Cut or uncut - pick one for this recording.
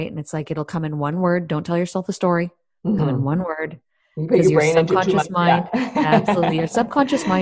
uncut